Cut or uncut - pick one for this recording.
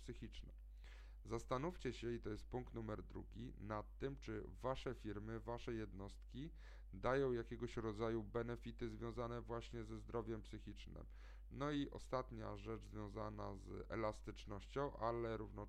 cut